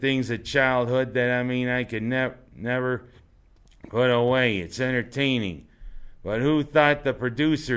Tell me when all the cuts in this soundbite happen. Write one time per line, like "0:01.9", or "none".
0:04.8